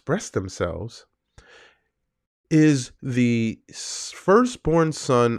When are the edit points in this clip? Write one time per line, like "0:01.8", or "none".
none